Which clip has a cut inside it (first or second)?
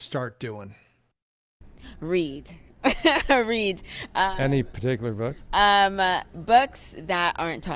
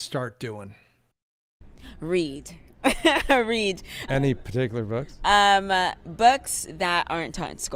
second